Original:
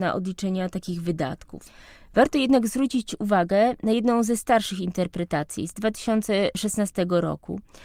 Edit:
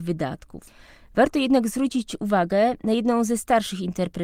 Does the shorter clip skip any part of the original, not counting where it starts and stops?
no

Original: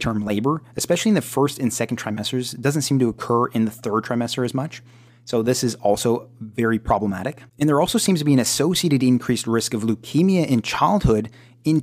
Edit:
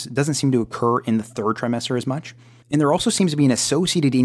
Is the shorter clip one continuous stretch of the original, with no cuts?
no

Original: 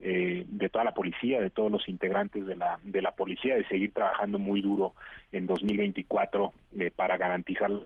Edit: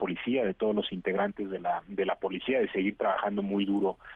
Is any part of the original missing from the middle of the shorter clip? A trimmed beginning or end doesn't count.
no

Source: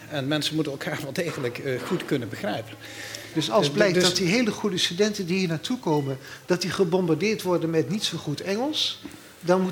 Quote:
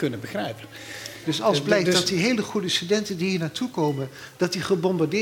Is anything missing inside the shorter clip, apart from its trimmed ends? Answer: no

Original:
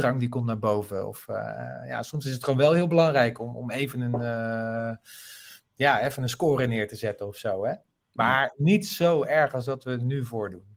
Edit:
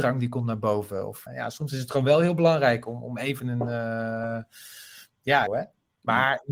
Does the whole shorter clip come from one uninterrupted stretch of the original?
no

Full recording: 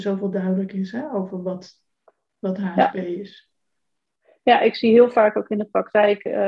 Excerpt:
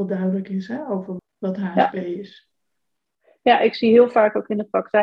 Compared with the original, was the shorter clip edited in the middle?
yes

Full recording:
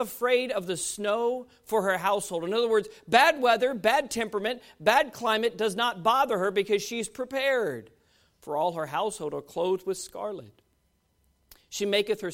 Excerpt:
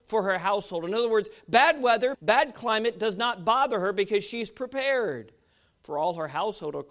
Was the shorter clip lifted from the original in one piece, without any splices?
no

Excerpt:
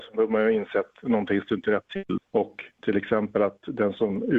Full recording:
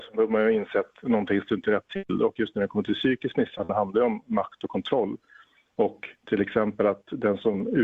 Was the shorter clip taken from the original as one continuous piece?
no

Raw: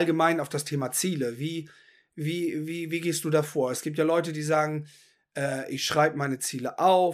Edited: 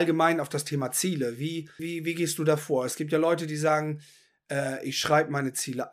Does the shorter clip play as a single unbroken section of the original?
no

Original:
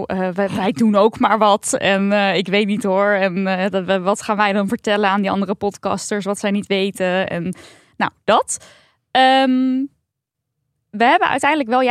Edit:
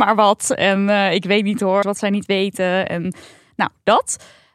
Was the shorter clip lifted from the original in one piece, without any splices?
no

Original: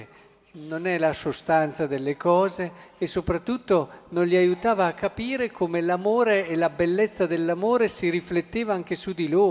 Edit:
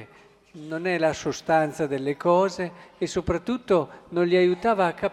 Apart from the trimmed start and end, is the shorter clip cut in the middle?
no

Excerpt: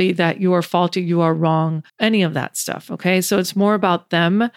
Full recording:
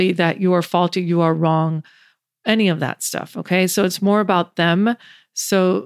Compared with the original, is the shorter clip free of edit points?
no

